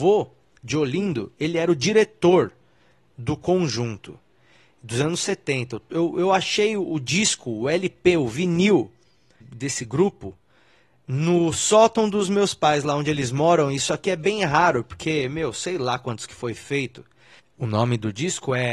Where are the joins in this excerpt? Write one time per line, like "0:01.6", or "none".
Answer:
0:09.4
0:17.4